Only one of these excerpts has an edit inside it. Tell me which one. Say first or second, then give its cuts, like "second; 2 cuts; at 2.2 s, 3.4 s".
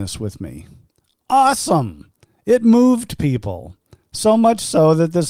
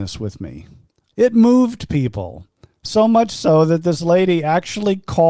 second; 1 cut; at 1.1 s